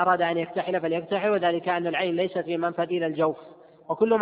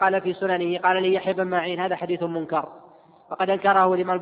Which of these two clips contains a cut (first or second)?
first